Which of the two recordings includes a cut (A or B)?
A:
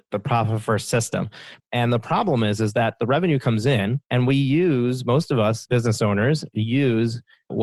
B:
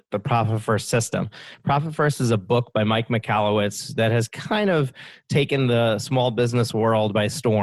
A